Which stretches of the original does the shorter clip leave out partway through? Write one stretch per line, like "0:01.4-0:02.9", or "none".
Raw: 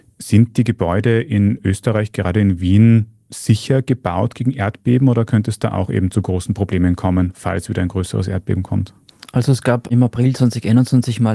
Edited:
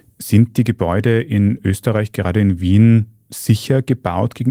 none